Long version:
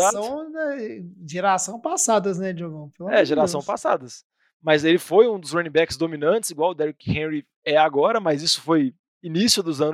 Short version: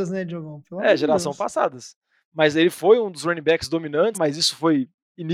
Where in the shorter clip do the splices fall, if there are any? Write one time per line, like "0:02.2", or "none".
0:04.1